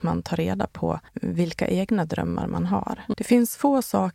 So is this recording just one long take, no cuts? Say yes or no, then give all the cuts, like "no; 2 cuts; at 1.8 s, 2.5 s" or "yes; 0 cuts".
no; 2 cuts; at 1.1 s, 3.1 s